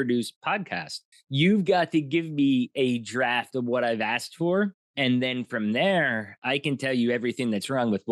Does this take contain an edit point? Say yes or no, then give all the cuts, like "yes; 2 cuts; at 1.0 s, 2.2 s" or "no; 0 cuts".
yes; 1 cut; at 1.1 s